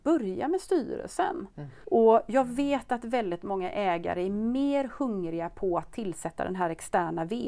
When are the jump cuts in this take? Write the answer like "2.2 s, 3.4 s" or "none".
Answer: 1.8 s